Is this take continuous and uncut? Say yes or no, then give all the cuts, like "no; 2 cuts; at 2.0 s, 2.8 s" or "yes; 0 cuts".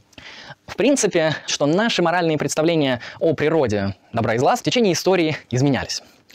no; 2 cuts; at 1.5 s, 4.6 s